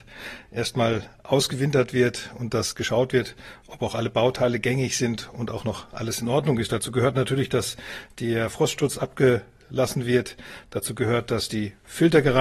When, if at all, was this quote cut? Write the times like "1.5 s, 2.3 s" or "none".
none